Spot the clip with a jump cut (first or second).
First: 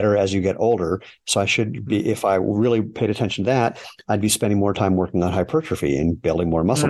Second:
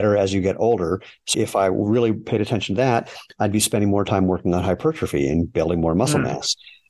second